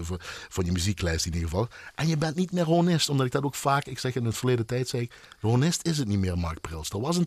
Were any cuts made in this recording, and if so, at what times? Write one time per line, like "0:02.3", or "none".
none